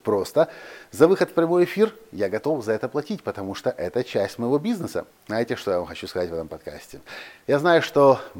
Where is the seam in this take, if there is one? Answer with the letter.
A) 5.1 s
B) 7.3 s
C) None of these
A